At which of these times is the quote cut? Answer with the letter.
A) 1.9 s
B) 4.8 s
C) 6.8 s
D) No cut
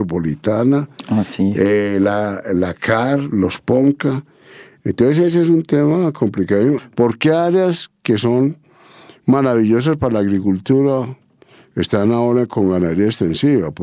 C